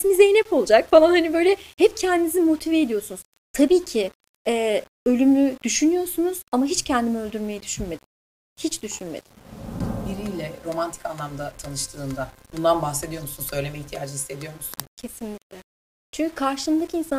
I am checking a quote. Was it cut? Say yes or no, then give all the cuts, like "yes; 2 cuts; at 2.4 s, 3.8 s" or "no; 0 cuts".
no; 0 cuts